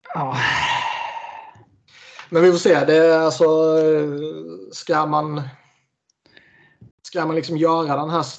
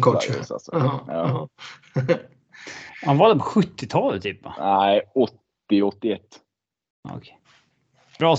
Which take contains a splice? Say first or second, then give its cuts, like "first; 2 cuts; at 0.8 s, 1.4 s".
first; 1 cut; at 6.9 s